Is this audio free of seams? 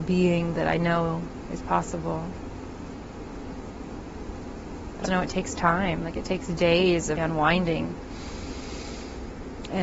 no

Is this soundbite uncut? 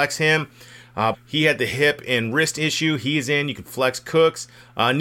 no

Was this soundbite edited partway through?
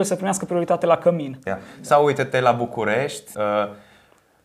yes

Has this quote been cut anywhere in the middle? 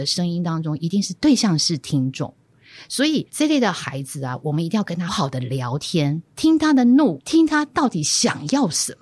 yes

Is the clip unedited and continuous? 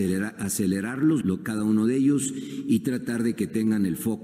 no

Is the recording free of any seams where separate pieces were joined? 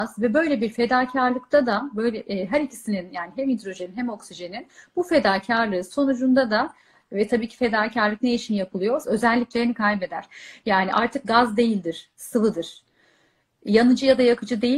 no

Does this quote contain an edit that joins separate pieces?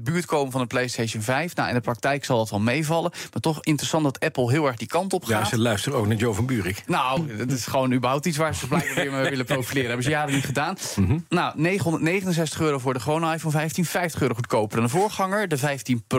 yes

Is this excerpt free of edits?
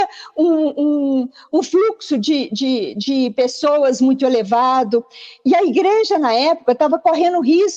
yes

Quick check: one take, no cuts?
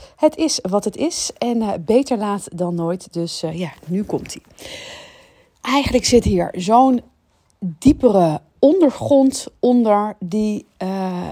no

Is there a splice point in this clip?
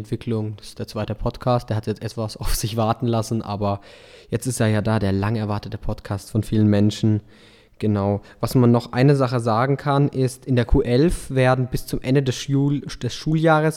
no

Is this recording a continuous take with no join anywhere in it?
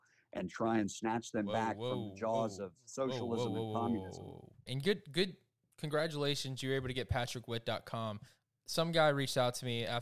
no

